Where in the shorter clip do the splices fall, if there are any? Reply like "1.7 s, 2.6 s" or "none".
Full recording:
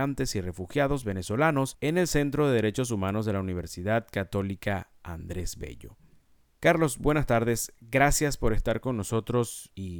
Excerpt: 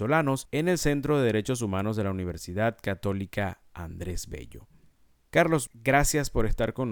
5.7 s